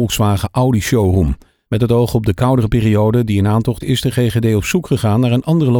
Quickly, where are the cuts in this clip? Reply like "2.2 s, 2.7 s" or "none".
1.7 s, 3.8 s